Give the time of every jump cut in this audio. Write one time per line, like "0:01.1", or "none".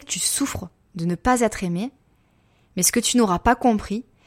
none